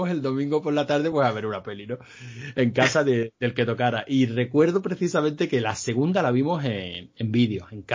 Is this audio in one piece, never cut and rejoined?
yes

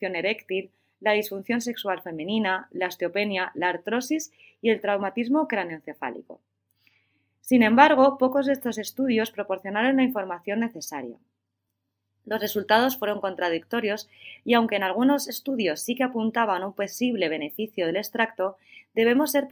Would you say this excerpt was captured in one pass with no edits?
yes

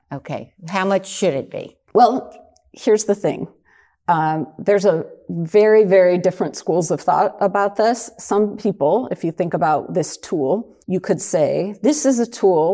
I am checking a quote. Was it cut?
yes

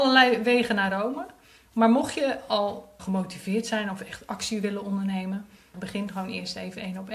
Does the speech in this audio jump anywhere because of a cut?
yes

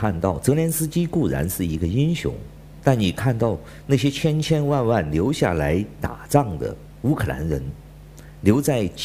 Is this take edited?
no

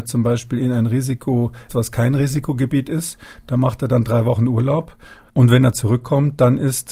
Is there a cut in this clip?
yes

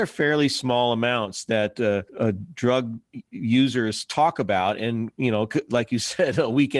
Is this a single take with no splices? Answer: no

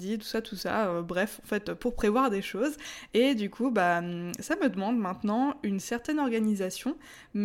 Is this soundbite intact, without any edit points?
yes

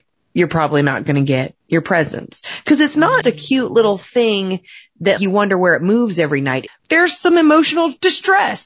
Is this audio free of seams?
no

